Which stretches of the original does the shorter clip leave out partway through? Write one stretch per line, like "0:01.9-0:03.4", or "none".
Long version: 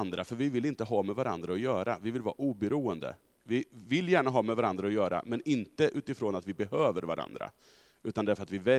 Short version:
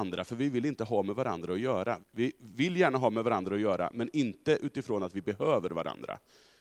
0:02.0-0:03.3